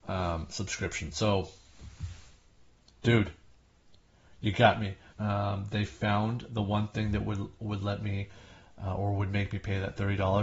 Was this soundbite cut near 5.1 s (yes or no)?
yes